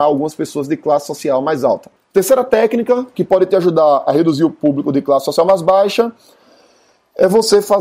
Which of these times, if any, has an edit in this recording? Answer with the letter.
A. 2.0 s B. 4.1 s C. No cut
A